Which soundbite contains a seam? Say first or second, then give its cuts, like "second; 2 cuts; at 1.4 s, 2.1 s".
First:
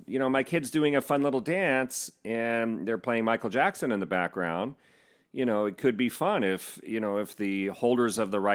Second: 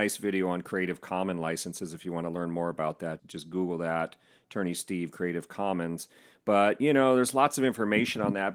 second; 1 cut; at 3.2 s